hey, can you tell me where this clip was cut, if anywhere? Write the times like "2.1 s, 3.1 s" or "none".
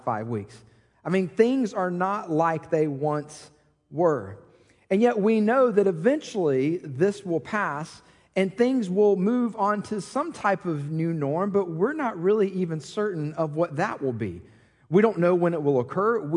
none